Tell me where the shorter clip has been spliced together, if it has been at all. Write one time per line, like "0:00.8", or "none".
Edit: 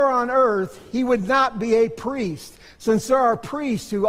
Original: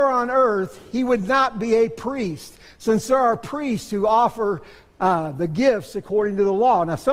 none